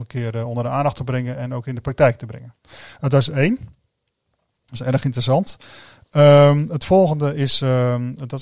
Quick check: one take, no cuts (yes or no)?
yes